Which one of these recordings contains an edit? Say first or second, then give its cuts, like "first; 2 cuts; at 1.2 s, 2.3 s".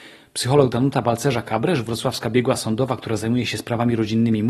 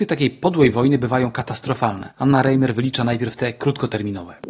second; 1 cut; at 2.1 s